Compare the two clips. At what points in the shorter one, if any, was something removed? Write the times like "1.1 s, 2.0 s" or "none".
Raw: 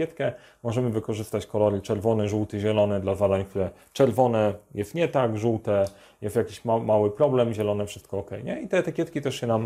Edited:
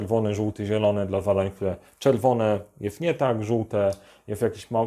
none